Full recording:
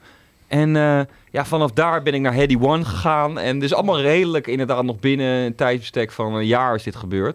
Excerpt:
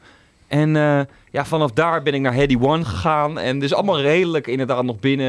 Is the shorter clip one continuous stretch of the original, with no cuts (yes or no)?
yes